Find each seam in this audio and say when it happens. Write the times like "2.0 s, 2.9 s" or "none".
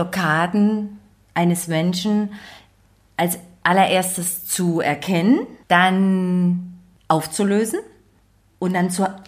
5.6 s